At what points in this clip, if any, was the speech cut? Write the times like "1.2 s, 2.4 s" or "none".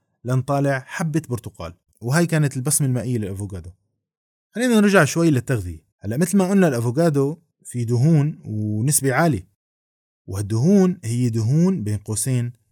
5.9 s